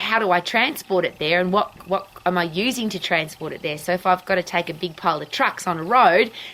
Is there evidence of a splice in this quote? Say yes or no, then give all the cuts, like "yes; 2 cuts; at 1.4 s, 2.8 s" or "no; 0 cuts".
no; 0 cuts